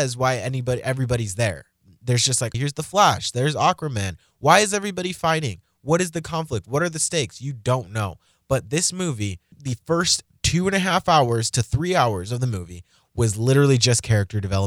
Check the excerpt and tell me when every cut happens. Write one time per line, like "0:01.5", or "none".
0:02.5
0:09.5